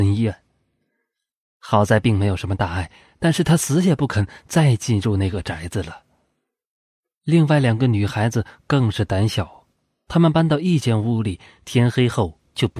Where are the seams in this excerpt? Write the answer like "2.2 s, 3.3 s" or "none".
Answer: none